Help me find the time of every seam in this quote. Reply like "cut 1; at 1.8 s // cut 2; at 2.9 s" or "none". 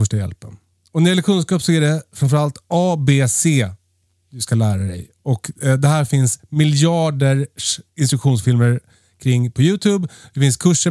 cut 1; at 7.9 s

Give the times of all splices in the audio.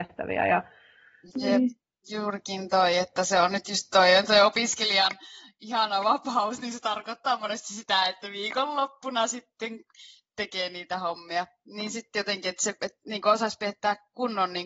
cut 1; at 1.3 s

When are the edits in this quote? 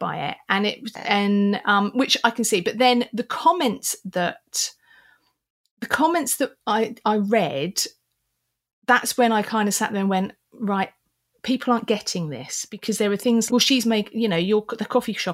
cut 1; at 13.5 s

